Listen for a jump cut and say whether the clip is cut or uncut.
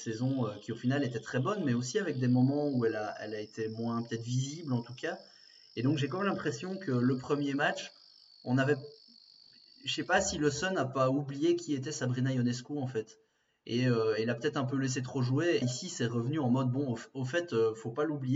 cut